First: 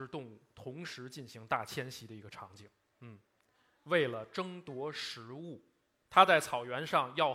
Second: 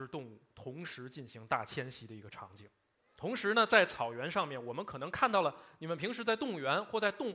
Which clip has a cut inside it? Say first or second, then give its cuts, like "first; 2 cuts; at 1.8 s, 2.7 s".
first; 2 cuts; at 2.9 s, 6.1 s